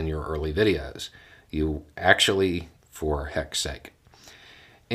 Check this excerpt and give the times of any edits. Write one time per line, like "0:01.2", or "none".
0:02.8